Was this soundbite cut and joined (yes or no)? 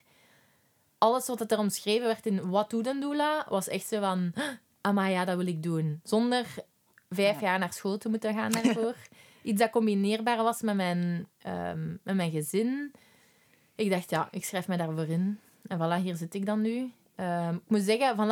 no